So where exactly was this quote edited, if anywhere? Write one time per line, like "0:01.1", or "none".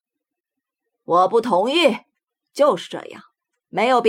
none